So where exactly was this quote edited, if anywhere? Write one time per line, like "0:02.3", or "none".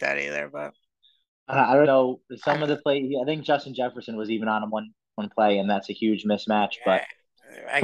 0:01.8